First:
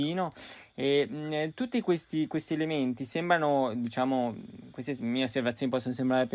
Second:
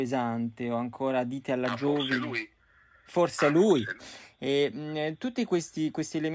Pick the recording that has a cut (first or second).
second